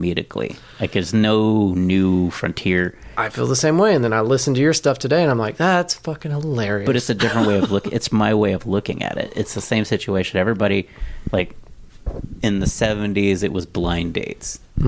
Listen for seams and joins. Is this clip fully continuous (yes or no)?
yes